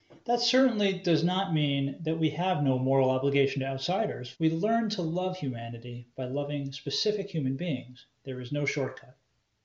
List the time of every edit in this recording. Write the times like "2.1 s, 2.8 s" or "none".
4.3 s